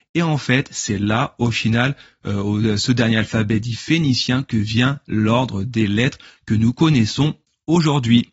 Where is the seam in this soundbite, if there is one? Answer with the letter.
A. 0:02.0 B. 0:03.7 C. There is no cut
C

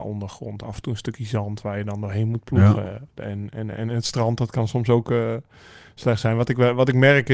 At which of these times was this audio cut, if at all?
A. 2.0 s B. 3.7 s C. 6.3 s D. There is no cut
D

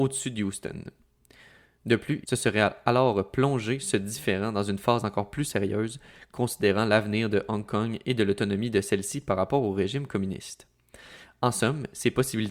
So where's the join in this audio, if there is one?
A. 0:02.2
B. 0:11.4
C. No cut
A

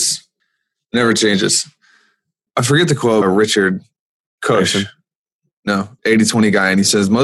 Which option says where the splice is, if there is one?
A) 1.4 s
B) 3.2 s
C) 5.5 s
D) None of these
B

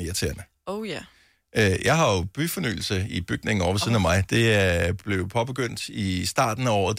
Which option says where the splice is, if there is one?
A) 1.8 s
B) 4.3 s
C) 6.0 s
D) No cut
D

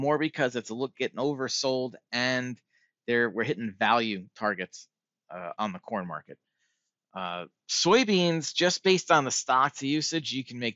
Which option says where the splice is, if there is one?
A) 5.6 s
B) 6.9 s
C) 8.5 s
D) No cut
A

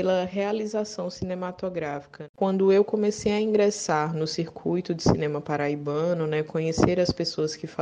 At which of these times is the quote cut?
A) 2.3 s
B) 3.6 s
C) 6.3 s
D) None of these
A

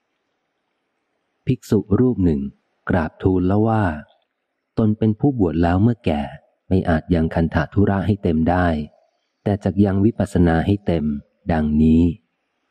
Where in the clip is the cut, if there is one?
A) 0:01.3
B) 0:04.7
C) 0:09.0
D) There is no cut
D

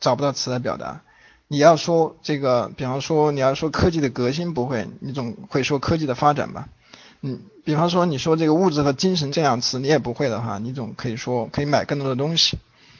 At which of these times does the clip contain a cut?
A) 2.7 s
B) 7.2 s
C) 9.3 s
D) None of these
C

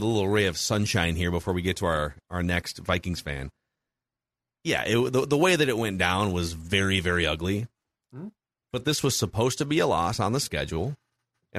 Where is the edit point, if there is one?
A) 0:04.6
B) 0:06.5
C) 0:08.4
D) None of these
D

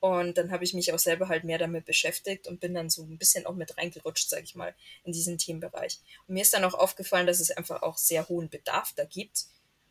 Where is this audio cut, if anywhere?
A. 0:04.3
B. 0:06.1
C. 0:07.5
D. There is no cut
D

